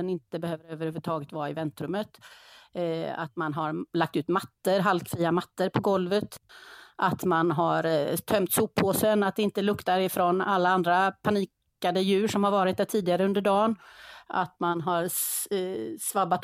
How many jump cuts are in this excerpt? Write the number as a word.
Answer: zero